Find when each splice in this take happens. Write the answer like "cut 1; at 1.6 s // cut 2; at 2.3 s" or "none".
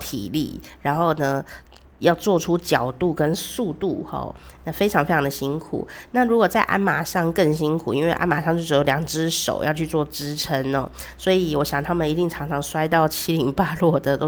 none